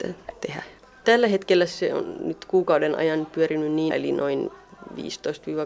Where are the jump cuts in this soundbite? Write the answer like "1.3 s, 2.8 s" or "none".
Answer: 1.0 s, 3.9 s